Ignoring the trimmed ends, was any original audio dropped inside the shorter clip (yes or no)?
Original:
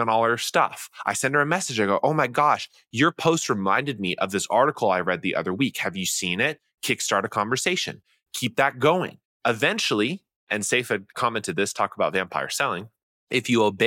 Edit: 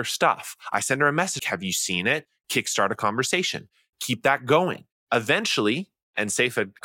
yes